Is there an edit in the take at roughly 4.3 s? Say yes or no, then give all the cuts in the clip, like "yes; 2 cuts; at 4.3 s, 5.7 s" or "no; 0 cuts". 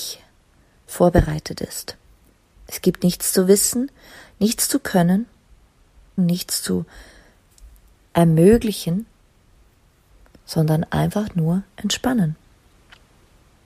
no; 1 cut; at 6.2 s